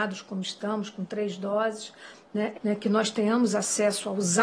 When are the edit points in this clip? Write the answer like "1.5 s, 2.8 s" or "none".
2.5 s